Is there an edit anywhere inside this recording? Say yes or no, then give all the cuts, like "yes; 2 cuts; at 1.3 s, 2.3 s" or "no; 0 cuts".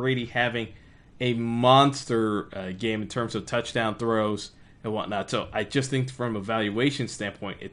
no; 0 cuts